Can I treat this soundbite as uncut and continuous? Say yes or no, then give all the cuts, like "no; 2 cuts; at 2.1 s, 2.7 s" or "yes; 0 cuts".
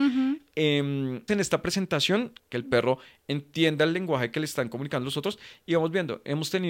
no; 2 cuts; at 1.3 s, 2.4 s